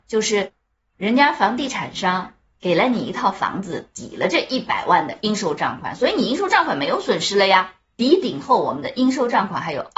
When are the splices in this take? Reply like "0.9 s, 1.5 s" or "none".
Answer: 7.9 s